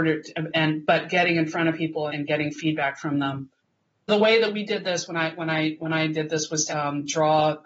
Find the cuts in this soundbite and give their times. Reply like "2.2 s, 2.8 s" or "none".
2.1 s, 4.1 s, 6.7 s